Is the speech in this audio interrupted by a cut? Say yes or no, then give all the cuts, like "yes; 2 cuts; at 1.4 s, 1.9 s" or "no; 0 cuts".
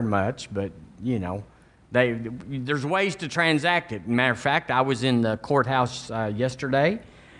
no; 0 cuts